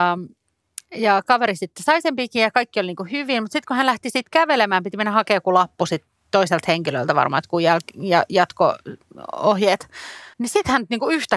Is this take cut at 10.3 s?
yes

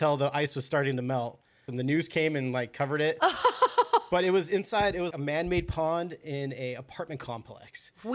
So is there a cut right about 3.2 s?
no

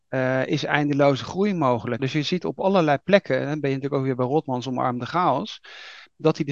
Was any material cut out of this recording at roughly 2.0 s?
yes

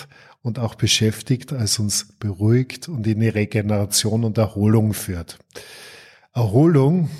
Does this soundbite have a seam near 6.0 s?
no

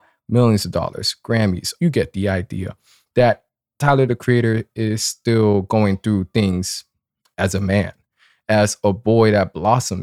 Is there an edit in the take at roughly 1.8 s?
yes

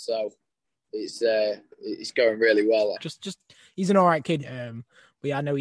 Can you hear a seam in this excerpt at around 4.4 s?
yes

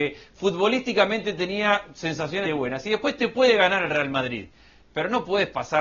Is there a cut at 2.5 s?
yes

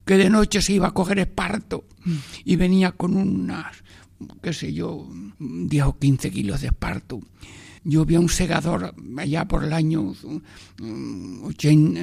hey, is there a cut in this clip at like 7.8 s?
yes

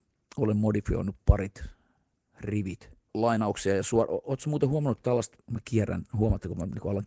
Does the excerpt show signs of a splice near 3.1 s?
yes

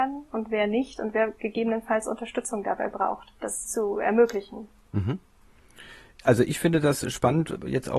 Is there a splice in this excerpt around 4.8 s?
no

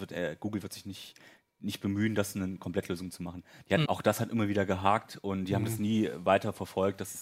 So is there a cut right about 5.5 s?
no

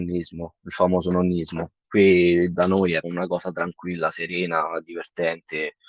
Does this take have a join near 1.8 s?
no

